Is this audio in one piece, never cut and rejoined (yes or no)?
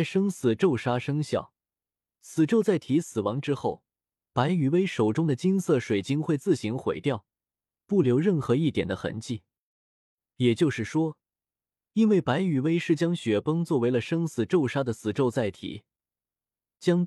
yes